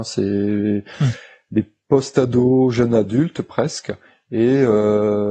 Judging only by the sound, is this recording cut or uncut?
uncut